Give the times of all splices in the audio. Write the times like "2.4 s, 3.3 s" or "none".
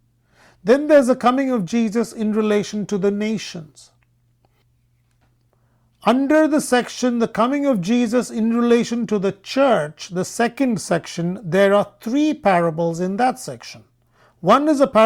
none

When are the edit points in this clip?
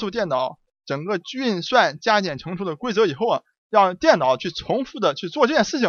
none

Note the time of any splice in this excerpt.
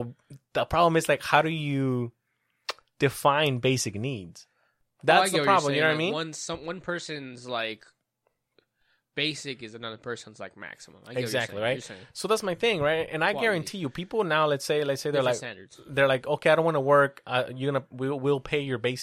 none

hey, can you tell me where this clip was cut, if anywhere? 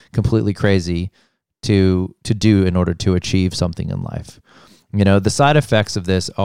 none

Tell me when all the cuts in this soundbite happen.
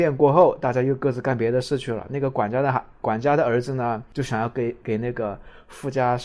none

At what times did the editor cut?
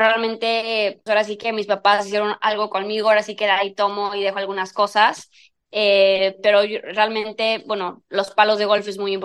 1.1 s

